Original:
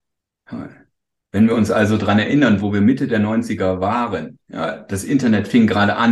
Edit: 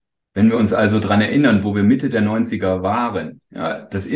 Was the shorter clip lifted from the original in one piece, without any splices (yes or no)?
yes